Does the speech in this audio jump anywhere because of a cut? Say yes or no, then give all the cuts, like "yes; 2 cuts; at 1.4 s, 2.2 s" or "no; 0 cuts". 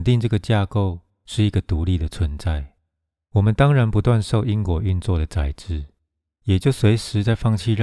no; 0 cuts